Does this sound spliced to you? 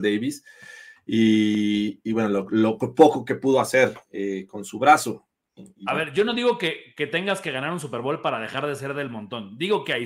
no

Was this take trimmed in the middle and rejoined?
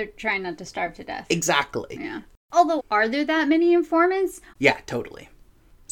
yes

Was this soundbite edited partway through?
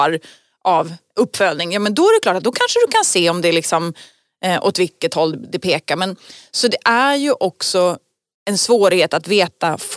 no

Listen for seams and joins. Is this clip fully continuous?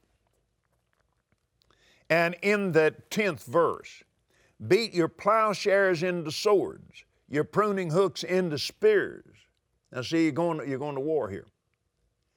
yes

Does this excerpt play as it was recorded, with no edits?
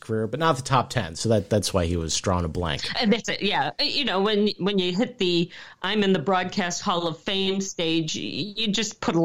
yes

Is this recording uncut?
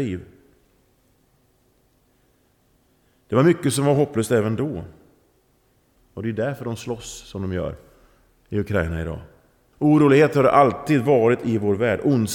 no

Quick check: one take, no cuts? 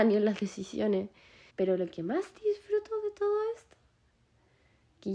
no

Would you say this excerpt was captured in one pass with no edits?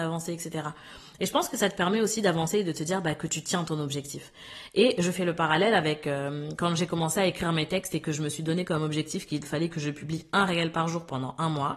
yes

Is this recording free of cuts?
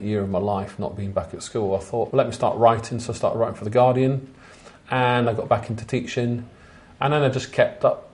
no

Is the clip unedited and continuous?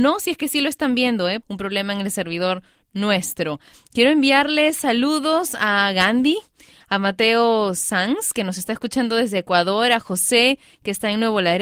no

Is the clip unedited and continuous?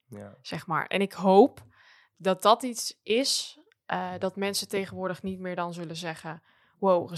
no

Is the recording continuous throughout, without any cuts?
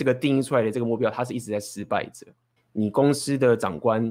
no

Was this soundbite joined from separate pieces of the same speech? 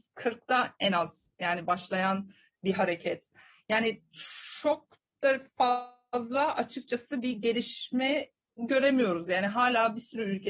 no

